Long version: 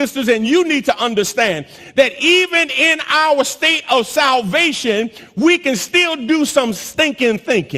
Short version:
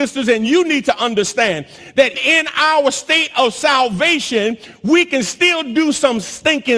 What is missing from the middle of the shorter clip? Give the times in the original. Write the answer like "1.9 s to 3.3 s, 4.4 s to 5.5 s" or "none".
2.1 s to 2.7 s